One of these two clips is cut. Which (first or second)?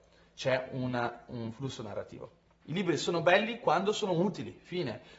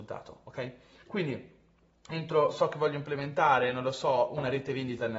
first